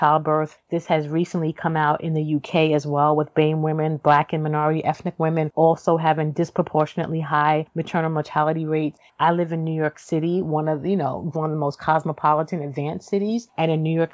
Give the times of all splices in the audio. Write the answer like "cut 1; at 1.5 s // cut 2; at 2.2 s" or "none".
cut 1; at 11.3 s

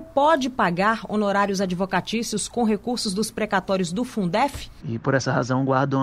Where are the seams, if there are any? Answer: cut 1; at 4.8 s

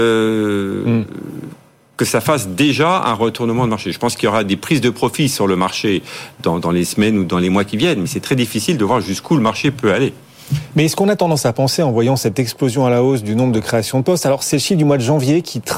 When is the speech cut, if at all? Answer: none

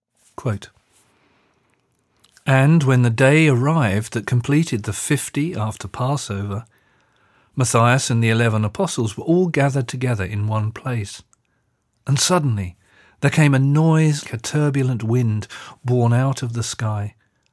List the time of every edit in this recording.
cut 1; at 14.2 s

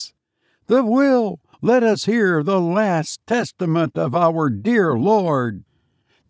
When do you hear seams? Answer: cut 1; at 1.5 s

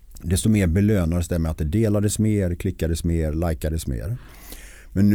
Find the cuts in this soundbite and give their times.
none

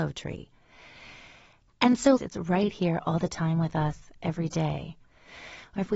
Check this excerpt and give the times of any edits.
cut 1; at 2.2 s

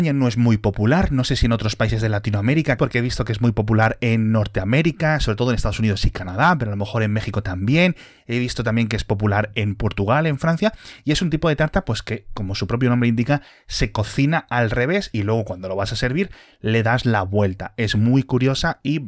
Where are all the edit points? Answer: cut 1; at 2.8 s

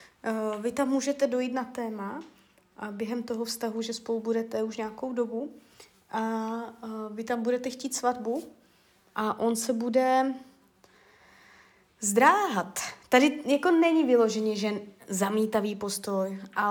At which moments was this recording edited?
none

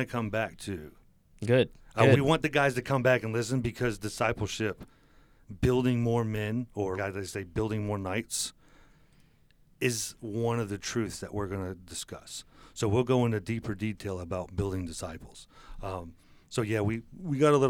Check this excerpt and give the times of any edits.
cut 1; at 7.0 s

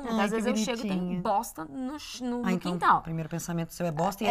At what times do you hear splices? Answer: cut 1; at 2.4 s

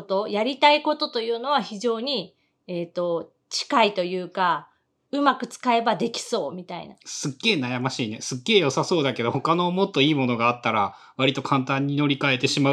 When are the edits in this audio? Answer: none

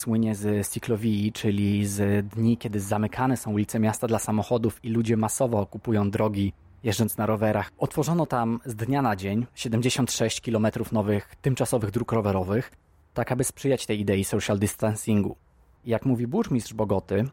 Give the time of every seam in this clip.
cut 1; at 7.7 s // cut 2; at 9.5 s // cut 3; at 15.8 s

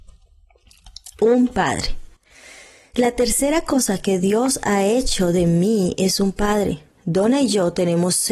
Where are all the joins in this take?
none

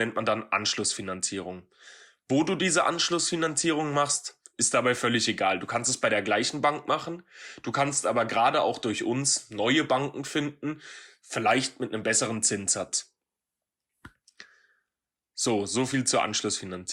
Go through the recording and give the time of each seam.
none

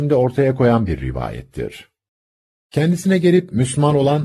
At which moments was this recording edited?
none

